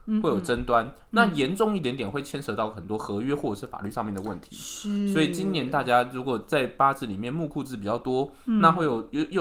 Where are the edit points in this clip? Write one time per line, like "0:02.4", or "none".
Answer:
none

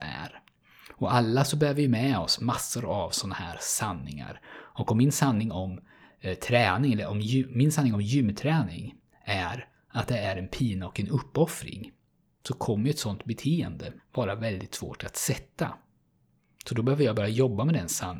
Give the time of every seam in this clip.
0:14.0

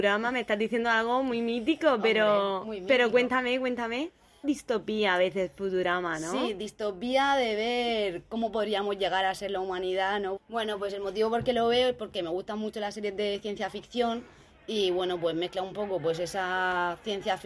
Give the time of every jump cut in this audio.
0:04.4
0:10.4

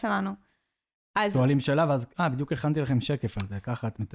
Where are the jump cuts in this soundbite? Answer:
0:01.0

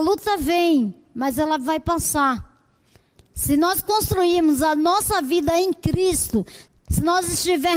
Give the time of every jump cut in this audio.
0:03.2
0:06.7

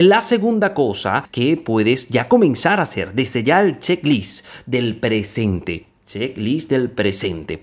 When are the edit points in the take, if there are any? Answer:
none

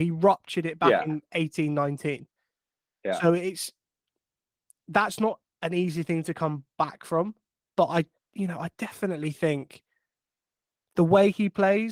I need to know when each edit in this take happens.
none

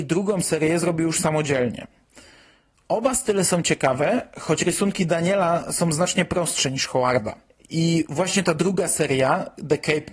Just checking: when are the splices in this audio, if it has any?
none

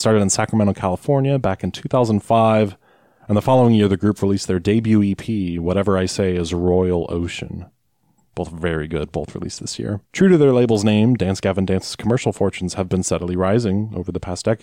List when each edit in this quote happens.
0:08.2
0:10.1

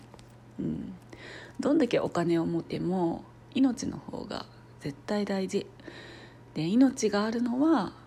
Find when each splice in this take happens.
0:02.6

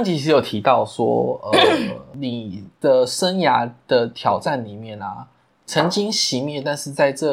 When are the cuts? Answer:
none

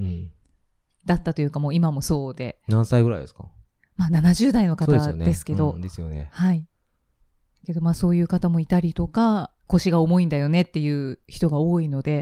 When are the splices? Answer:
0:09.7

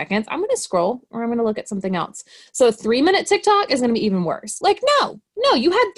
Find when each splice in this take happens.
0:04.6

